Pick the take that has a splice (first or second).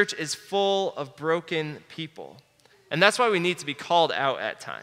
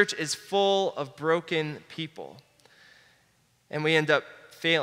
first